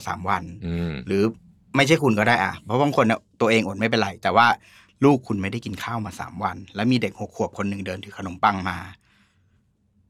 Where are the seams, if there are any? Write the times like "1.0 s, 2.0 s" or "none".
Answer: none